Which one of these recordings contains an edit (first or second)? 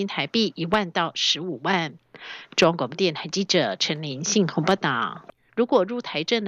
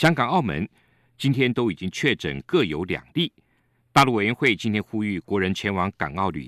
first